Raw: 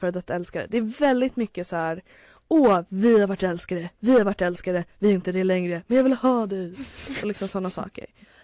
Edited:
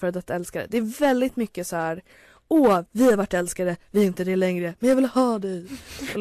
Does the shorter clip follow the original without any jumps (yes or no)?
no